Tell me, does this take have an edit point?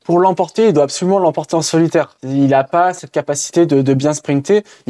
no; 0 cuts

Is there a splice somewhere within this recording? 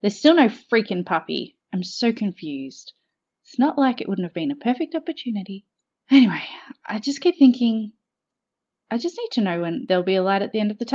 no; 0 cuts

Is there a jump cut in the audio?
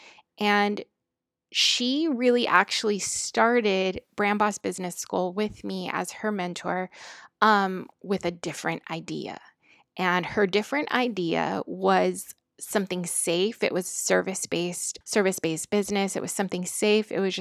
yes; 1 cut; at 15.0 s

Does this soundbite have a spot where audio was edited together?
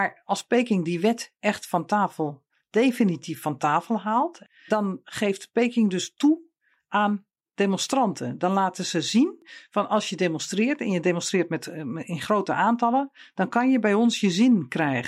yes; 1 cut; at 4.7 s

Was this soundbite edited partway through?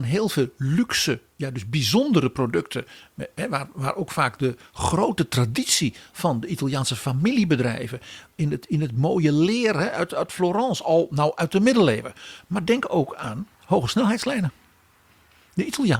yes; 2 cuts; at 12.4 s, 13.5 s

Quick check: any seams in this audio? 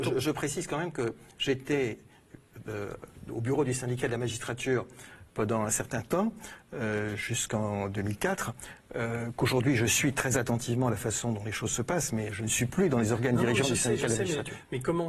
no; 0 cuts

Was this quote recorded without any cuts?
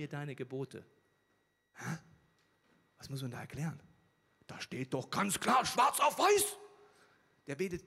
yes; 0 cuts

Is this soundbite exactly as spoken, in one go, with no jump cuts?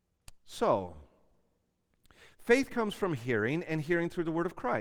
yes; 0 cuts

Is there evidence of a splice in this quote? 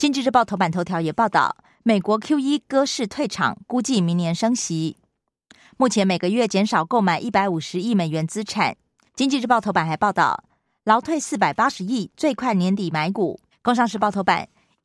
yes; 2 cuts; at 9.1 s, 13.5 s

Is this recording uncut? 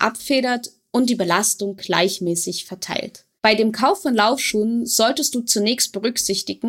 no; 1 cut; at 3.4 s

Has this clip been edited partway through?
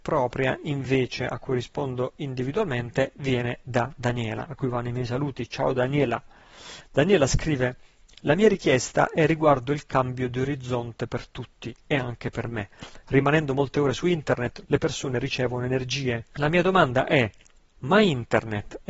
yes; 2 cuts; at 14.6 s, 16.3 s

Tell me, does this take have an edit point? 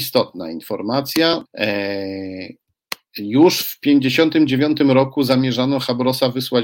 yes; 1 cut; at 1.5 s

